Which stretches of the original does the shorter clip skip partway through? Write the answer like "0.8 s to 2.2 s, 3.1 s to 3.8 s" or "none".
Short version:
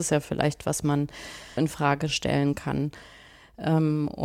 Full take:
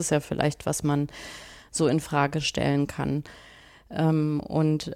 1.6 s to 1.9 s